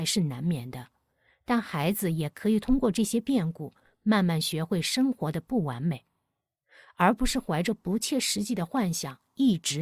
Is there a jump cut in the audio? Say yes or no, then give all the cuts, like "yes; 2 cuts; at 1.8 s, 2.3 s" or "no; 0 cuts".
no; 0 cuts